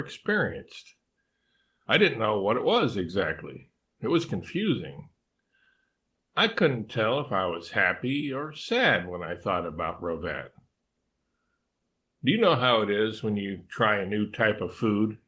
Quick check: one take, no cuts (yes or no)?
yes